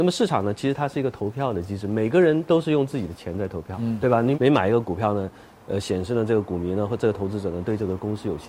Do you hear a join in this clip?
yes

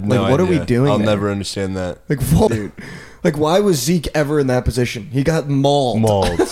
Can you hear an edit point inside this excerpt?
yes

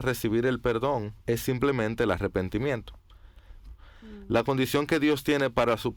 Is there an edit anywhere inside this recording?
yes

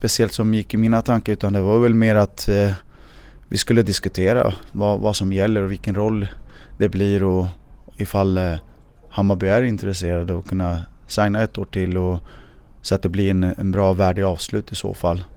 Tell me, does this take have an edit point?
no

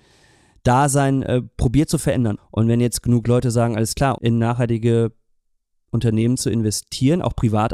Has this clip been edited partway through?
yes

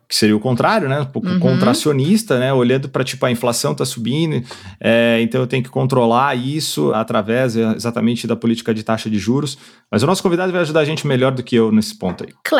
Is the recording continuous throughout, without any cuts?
no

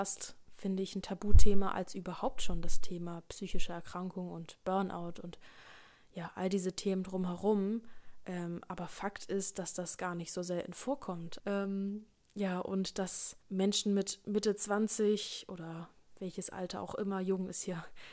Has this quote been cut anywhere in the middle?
yes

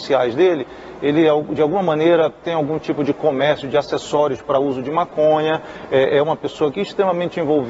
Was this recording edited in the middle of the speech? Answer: no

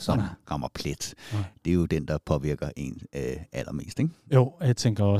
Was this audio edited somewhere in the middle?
no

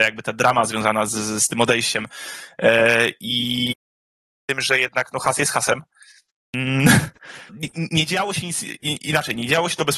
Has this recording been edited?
yes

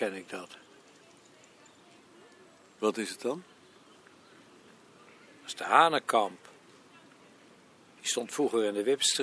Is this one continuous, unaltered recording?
yes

